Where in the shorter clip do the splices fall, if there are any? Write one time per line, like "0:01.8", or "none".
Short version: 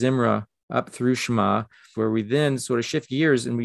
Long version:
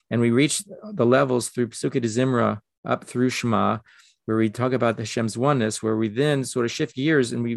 0:01.9